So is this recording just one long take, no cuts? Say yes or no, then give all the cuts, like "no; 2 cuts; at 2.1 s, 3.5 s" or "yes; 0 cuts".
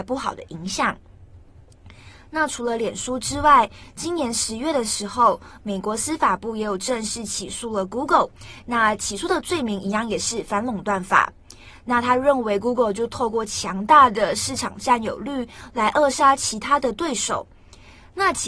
yes; 0 cuts